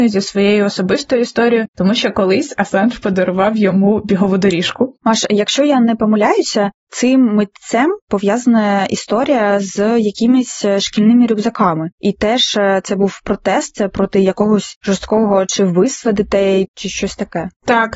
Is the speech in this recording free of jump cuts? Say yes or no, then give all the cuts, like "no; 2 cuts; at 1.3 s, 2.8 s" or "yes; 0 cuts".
no; 1 cut; at 5.0 s